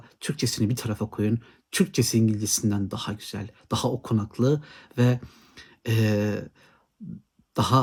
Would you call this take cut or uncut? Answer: uncut